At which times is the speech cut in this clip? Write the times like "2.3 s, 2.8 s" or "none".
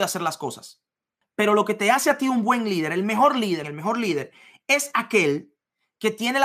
1.2 s, 3.6 s

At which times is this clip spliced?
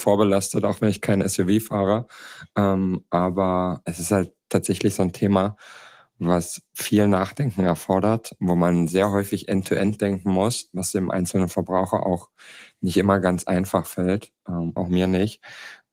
14.8 s

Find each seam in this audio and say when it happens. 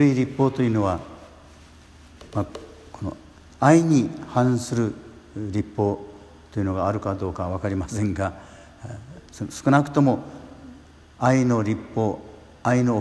none

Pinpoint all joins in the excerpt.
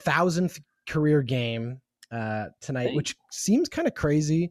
none

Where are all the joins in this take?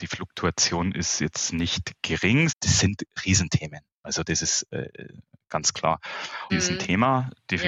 2.5 s, 6.5 s

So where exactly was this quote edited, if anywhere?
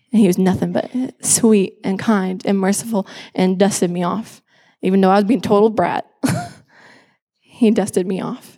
none

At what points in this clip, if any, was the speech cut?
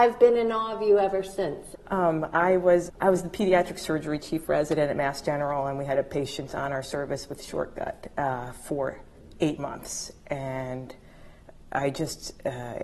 1.7 s, 2.9 s

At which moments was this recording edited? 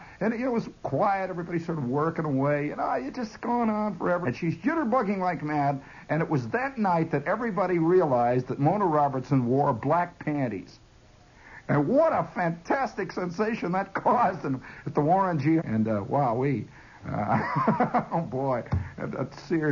4.2 s, 15.6 s

